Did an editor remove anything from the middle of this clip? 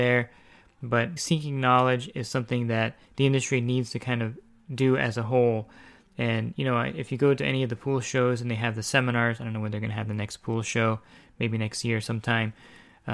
yes; 2 cuts; at 1.2 s, 3.0 s

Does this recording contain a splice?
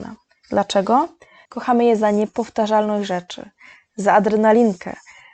yes; 1 cut; at 1.5 s

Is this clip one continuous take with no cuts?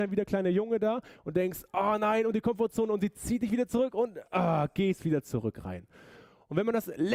yes; 0 cuts

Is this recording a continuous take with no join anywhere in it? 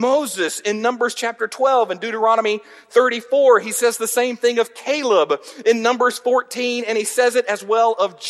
yes; 0 cuts

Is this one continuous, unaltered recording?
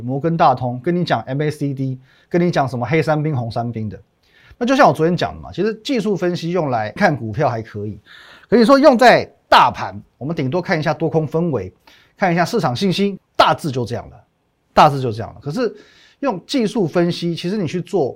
no; 2 cuts; at 7.0 s, 13.2 s

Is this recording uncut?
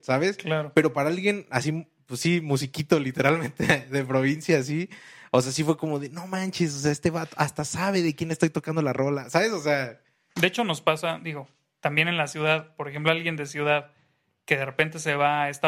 yes; 0 cuts

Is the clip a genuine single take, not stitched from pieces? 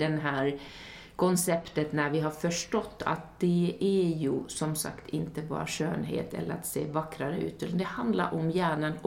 yes; 0 cuts

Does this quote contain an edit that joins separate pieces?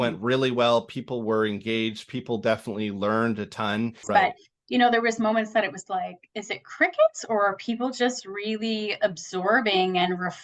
yes; 1 cut; at 4.0 s

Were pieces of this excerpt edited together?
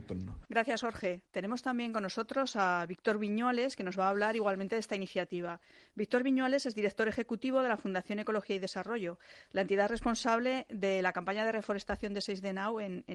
no; 0 cuts

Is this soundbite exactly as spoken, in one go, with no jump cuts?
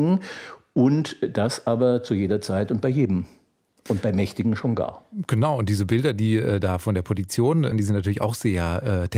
no; 1 cut; at 7.7 s

